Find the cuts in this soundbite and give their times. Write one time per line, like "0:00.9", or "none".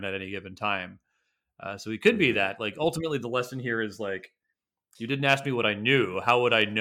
none